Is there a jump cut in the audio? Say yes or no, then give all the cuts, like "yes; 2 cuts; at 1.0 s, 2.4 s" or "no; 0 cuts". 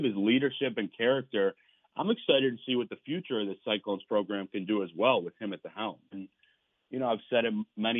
yes; 1 cut; at 6.1 s